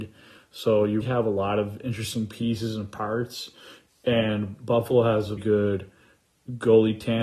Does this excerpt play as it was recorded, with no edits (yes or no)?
no